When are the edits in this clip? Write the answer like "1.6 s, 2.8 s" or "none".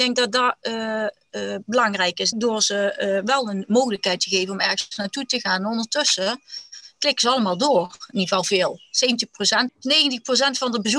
2.3 s, 9.7 s